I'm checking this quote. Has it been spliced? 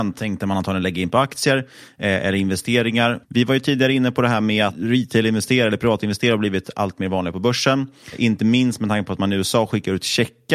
yes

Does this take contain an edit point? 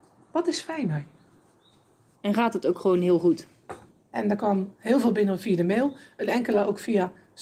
yes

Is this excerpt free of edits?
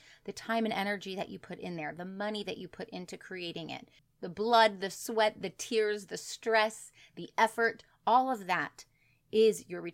no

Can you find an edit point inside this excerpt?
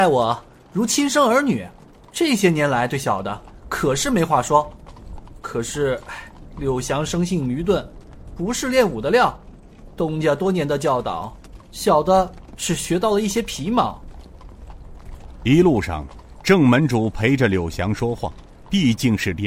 no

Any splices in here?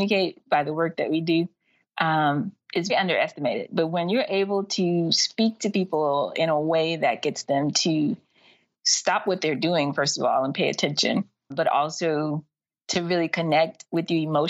yes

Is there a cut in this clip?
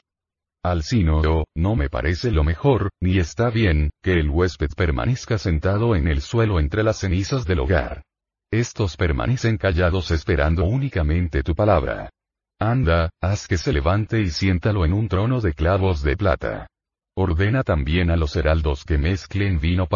no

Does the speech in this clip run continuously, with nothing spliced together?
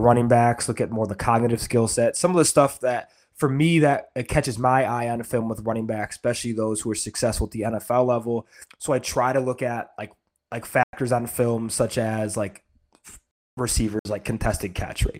no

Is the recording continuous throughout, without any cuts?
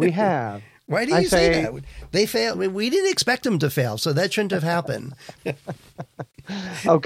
no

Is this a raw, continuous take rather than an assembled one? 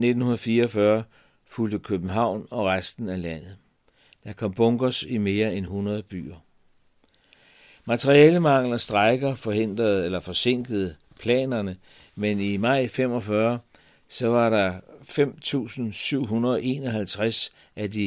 yes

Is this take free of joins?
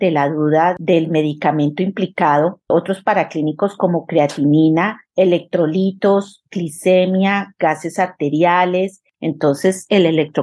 no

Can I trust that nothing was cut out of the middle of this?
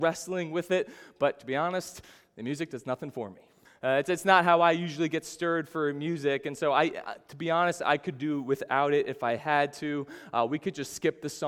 no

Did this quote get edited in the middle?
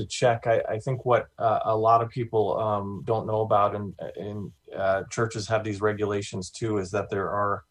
no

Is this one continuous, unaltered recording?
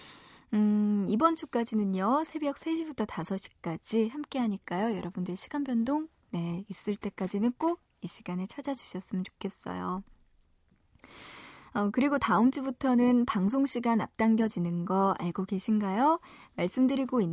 yes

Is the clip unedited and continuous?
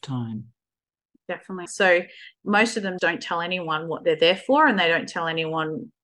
no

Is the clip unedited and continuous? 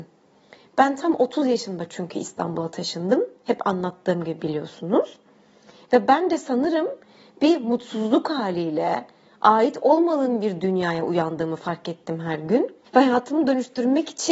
no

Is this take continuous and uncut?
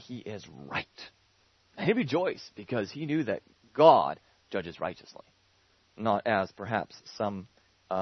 no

